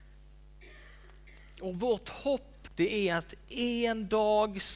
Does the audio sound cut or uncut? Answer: cut